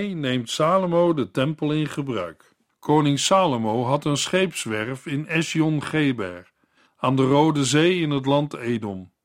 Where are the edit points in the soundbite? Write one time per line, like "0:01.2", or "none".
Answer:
0:02.7
0:06.9

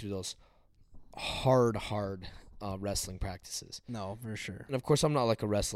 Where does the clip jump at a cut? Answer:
none

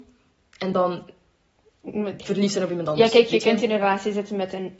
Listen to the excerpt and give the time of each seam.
none

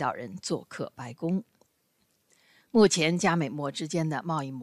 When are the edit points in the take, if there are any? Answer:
none

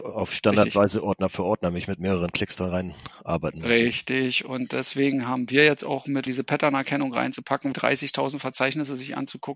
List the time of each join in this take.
0:06.3
0:07.7

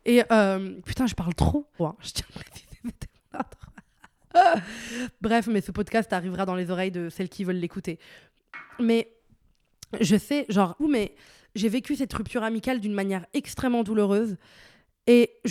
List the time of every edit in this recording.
0:01.8
0:10.8

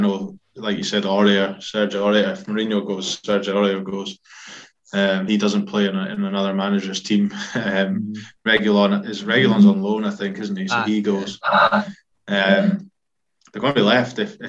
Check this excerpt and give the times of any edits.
none

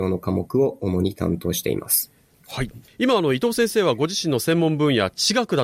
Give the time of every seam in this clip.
0:02.9

